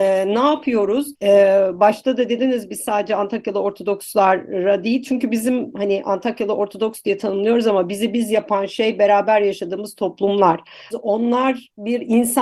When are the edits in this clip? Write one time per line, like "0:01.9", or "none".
0:01.1
0:10.9